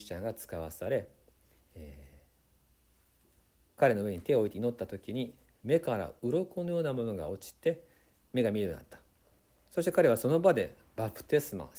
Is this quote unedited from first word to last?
yes; 0 cuts

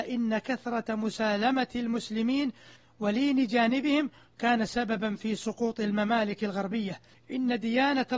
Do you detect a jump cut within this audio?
yes; 1 cut; at 7.1 s

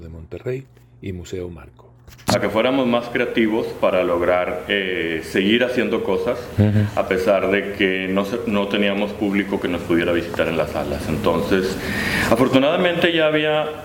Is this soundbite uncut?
no; 1 cut; at 2.3 s

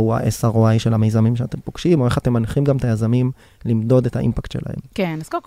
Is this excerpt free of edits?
yes; 0 cuts

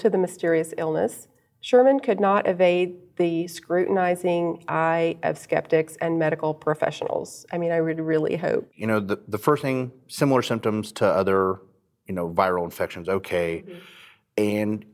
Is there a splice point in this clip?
no; 0 cuts

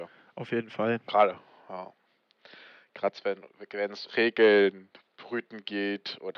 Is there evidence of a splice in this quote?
yes; 1 cut; at 4.1 s

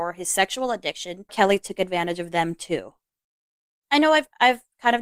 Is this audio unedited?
no; 1 cut; at 1.3 s

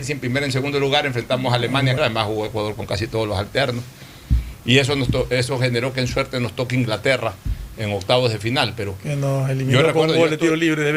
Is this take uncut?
no; 1 cut; at 2.0 s

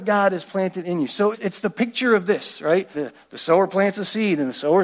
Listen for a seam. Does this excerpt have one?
yes; 2 cuts; at 1.3 s, 2.9 s

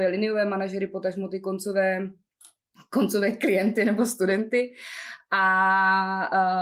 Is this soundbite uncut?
yes; 0 cuts

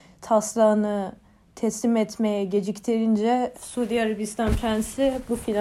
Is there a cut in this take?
yes; 1 cut; at 3.5 s

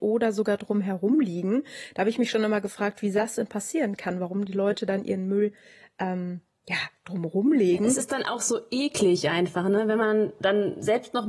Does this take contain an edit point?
no; 0 cuts

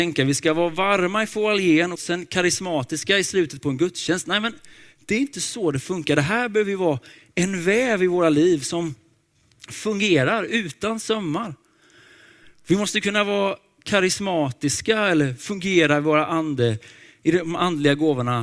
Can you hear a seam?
yes; 1 cut; at 1.9 s

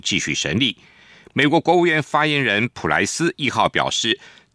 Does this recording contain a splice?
no; 0 cuts

